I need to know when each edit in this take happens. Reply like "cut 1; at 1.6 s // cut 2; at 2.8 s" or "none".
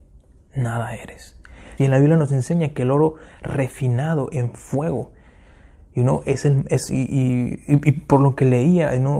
cut 1; at 1.8 s